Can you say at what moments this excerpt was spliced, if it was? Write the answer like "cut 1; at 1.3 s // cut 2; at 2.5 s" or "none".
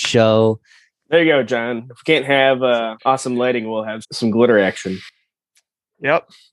cut 1; at 0.9 s // cut 2; at 3.0 s // cut 3; at 4.0 s